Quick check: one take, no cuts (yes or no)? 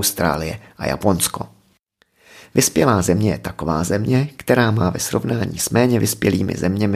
yes